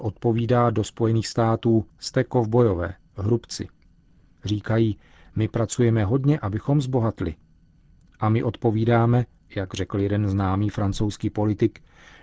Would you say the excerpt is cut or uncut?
cut